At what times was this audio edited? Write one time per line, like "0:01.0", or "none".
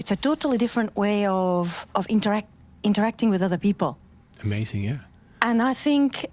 0:01.9